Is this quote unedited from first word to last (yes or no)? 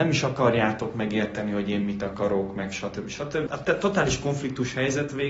no